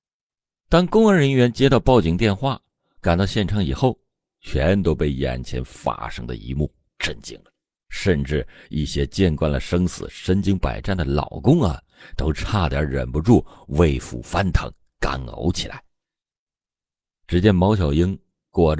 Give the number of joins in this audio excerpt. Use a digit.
0